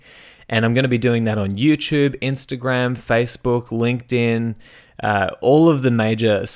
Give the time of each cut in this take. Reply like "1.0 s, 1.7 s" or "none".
none